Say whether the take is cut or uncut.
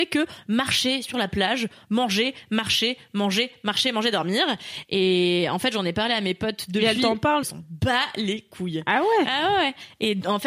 cut